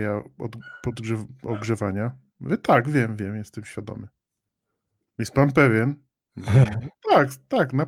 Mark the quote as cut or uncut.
uncut